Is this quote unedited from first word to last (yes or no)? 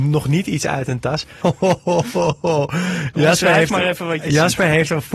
no